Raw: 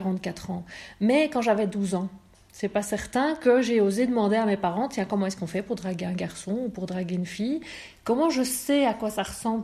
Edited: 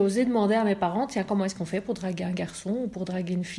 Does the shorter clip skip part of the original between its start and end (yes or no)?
no